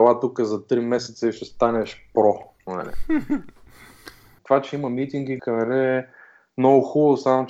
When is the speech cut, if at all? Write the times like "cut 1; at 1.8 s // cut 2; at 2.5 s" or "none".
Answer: cut 1; at 4.4 s // cut 2; at 5.4 s